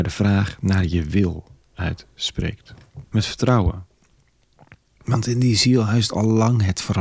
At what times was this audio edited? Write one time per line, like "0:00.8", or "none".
0:03.0